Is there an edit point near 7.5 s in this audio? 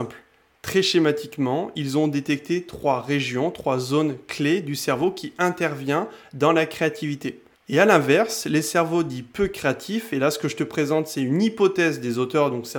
yes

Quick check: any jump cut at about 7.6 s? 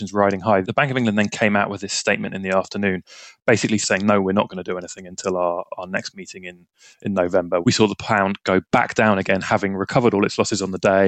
yes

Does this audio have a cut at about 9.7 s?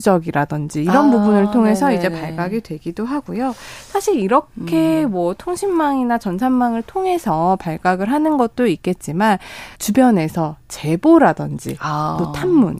yes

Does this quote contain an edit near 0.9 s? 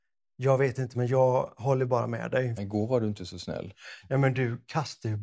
yes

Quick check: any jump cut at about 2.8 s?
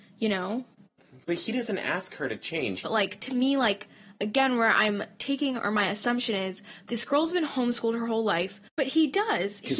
yes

